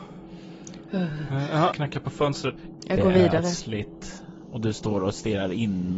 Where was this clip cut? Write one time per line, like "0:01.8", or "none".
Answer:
0:01.7
0:02.8